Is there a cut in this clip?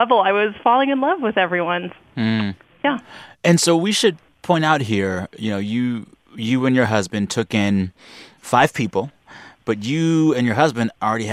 no; 0 cuts

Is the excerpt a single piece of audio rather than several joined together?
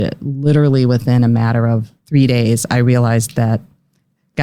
no; 1 cut; at 2.0 s

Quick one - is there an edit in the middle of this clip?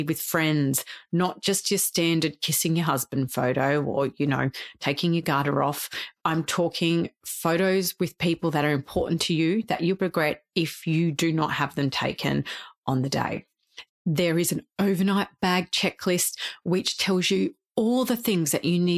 yes; 2 cuts; at 10.0 s, 13.9 s

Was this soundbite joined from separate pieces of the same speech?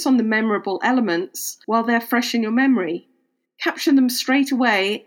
no; 0 cuts

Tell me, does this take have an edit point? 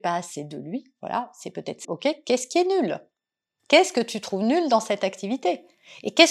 yes; 1 cut; at 1.8 s

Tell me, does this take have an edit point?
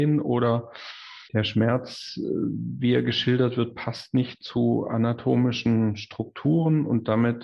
yes; 1 cut; at 1.3 s

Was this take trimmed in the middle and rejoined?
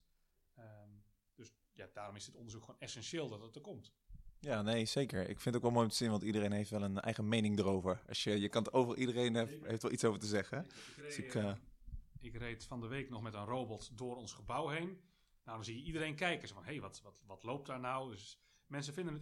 no; 0 cuts

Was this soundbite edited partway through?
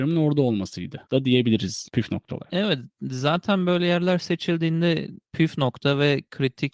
no; 0 cuts

